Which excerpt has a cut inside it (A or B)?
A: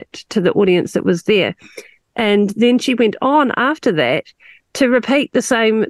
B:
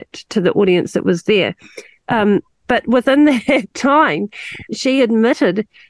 B